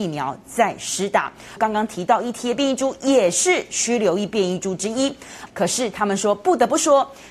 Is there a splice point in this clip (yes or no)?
yes